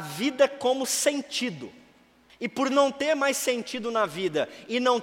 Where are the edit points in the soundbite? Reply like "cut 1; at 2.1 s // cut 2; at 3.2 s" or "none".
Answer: cut 1; at 2.3 s